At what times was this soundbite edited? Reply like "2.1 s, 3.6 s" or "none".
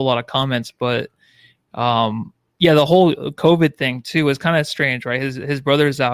none